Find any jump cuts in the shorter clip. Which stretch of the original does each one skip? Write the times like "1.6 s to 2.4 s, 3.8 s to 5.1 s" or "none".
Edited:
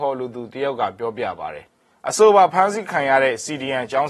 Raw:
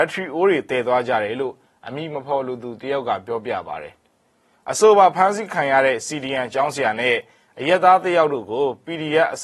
4.0 s to 4.3 s